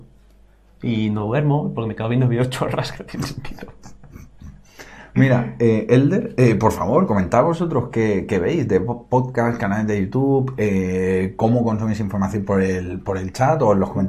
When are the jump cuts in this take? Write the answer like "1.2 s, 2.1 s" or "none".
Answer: none